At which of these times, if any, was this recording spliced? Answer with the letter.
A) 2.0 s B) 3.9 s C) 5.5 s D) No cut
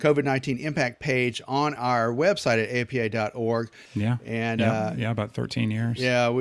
B